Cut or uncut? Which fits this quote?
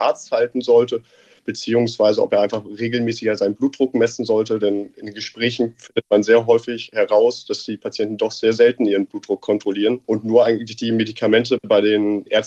cut